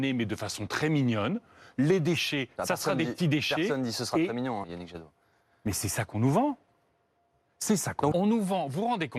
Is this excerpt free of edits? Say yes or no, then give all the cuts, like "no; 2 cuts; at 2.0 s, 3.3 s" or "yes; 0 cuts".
no; 2 cuts; at 4.6 s, 8.1 s